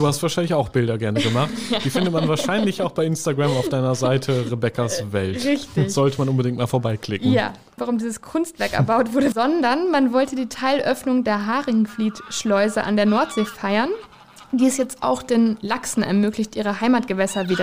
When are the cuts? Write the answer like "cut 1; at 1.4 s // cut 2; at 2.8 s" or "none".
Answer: cut 1; at 7.8 s // cut 2; at 9.3 s